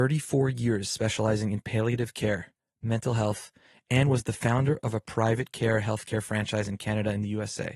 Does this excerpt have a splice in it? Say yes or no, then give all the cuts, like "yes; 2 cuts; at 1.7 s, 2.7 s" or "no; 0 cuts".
no; 0 cuts